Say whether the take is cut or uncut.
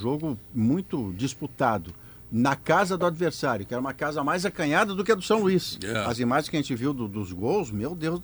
uncut